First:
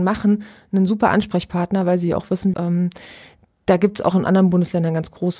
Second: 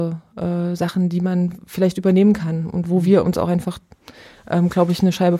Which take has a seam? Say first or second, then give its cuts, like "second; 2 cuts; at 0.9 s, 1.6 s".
first; 2 cuts; at 2.5 s, 4.1 s